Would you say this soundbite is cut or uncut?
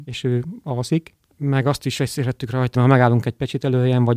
cut